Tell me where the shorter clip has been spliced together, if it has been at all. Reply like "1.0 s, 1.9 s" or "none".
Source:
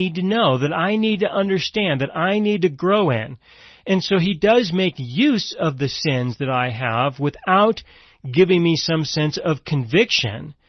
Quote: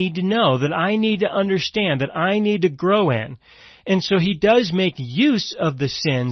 none